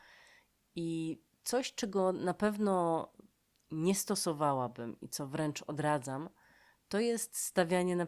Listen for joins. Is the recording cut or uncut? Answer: uncut